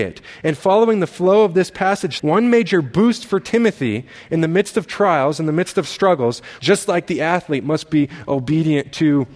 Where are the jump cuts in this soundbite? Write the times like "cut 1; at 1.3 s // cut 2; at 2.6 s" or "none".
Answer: cut 1; at 2.2 s // cut 2; at 6.6 s